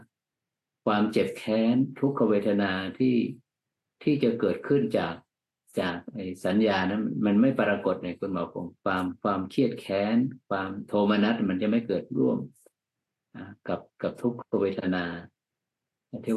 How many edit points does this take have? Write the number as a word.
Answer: one